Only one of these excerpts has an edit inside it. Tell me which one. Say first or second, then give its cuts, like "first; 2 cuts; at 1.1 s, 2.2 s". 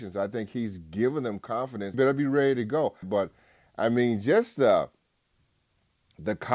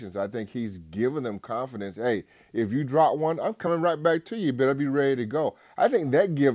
first; 2 cuts; at 1.9 s, 3.0 s